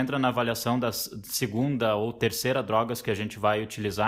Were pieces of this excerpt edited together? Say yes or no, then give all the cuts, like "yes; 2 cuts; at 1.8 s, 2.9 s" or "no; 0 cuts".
no; 0 cuts